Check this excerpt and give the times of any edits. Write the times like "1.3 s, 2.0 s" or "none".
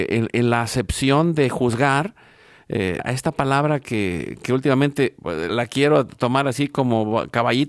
3.0 s, 5.5 s